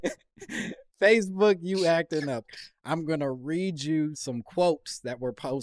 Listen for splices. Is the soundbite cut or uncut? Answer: uncut